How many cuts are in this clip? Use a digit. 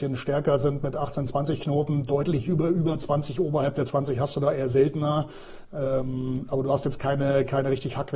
1